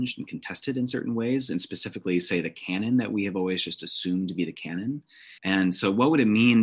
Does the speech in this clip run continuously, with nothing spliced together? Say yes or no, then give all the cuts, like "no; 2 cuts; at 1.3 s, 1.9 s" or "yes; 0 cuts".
no; 1 cut; at 5.4 s